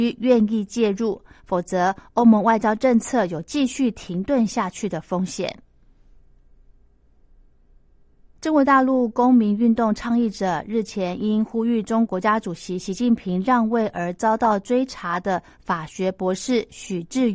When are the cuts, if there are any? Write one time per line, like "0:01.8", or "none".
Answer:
0:08.4
0:12.1